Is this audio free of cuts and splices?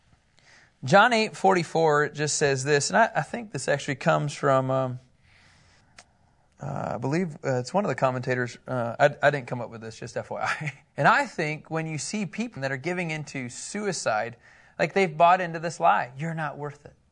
no; 2 cuts; at 10.8 s, 12.6 s

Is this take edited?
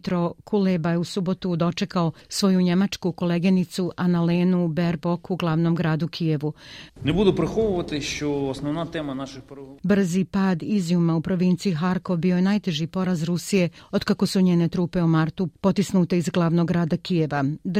yes; 2 cuts; at 6.9 s, 9.8 s

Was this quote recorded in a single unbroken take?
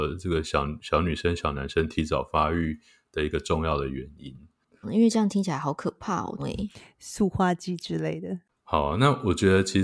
no; 2 cuts; at 4.8 s, 6.4 s

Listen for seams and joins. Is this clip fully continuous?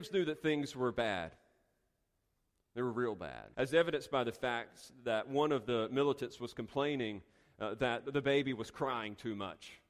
no; 1 cut; at 3.5 s

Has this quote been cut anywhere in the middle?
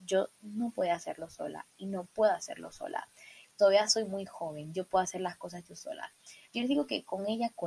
yes; 2 cuts; at 3.4 s, 6.5 s

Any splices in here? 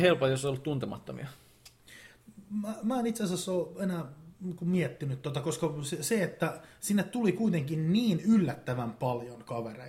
no; 0 cuts

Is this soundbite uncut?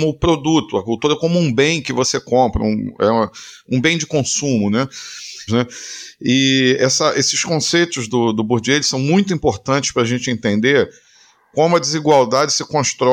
no; 1 cut; at 5.5 s

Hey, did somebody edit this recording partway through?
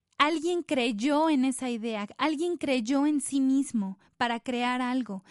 no; 0 cuts

